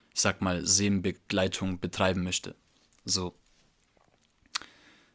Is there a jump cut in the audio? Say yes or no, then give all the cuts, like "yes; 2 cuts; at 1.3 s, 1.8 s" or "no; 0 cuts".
no; 0 cuts